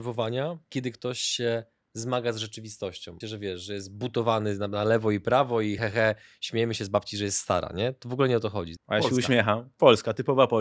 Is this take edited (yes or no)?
yes